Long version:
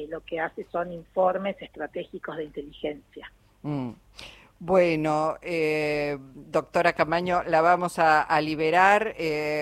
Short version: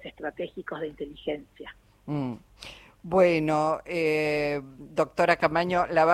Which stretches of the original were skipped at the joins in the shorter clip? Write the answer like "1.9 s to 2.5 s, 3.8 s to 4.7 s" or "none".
none